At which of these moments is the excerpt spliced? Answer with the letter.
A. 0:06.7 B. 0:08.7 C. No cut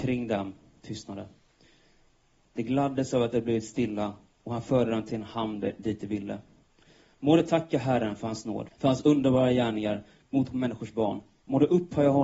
B